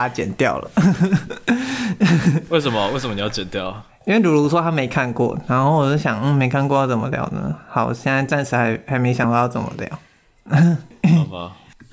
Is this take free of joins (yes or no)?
yes